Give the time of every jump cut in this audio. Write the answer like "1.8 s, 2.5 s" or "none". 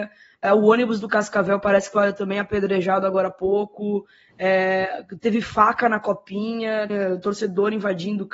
6.9 s